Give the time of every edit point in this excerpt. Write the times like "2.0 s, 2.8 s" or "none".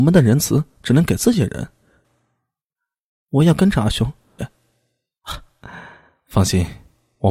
2.0 s, 4.4 s

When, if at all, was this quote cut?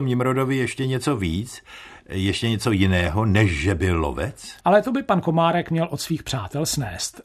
4.6 s

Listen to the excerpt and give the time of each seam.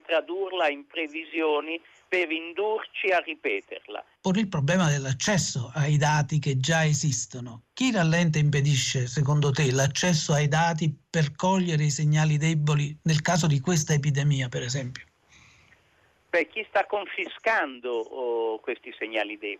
4.2 s

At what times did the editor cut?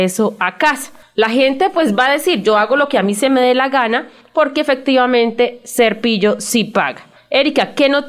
none

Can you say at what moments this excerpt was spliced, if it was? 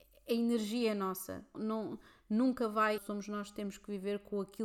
1.5 s, 3.0 s

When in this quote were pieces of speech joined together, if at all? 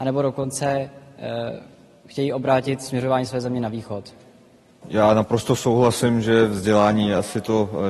4.8 s

